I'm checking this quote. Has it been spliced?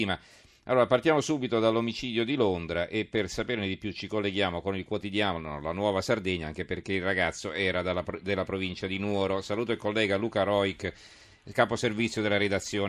no; 0 cuts

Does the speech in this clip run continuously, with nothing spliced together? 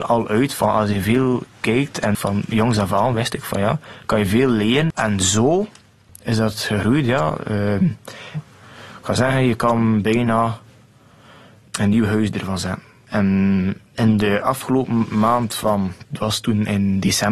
no; 1 cut; at 8.3 s

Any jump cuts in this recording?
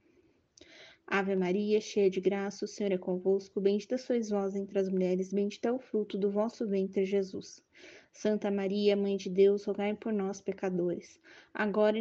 no; 0 cuts

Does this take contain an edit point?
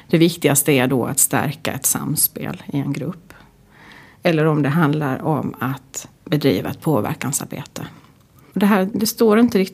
no; 0 cuts

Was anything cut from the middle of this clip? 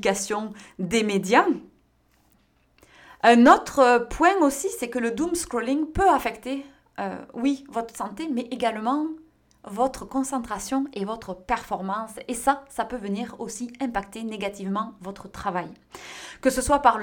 no; 0 cuts

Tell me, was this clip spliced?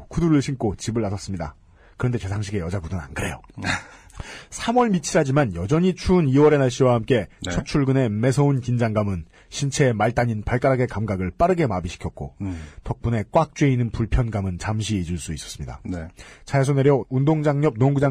no; 0 cuts

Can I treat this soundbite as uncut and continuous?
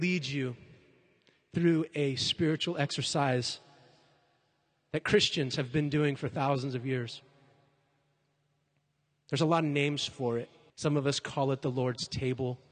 no; 1 cut; at 10.7 s

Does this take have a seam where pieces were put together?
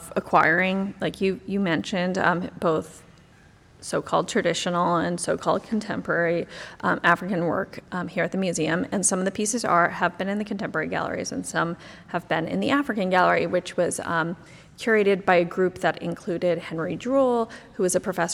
no; 0 cuts

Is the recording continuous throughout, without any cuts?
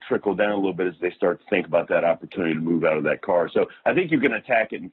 yes; 0 cuts

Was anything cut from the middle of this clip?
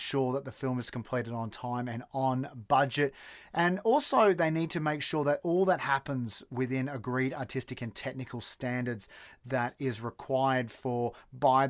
no; 0 cuts

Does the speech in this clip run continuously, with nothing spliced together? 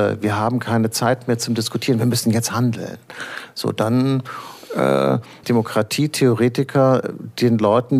no; 1 cut; at 5.4 s

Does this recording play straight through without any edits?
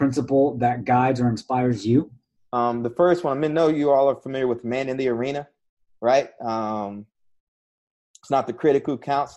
no; 1 cut; at 2.5 s

